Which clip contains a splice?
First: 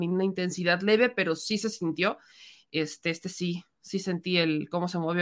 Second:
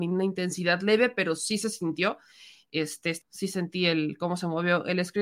second; 1 cut; at 3.2 s

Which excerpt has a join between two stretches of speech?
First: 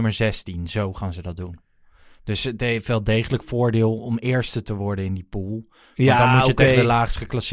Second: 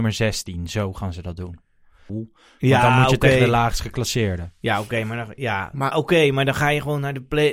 second; 2 cuts; at 2.1 s, 5.9 s

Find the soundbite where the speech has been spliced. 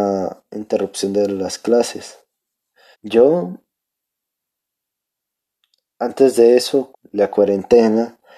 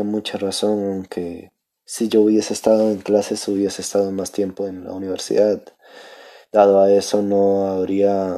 first; 2 cuts; at 2.9 s, 6.9 s

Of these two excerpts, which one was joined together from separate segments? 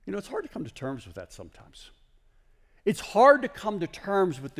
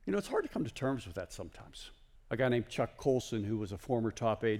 second; 1 cut; at 2.2 s

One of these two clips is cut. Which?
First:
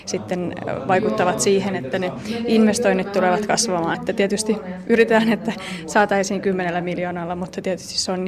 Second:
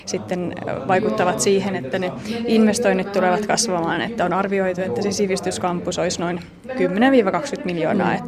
first; 1 cut; at 3.9 s

